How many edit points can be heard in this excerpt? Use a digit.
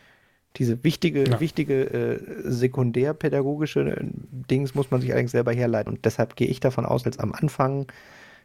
2